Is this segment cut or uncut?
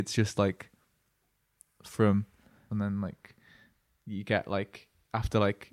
cut